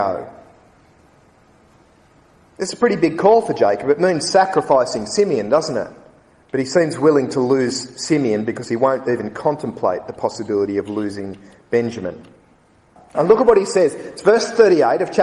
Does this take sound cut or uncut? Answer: cut